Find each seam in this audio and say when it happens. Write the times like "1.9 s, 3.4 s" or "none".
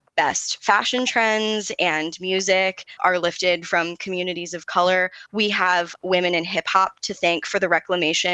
3.0 s, 5.3 s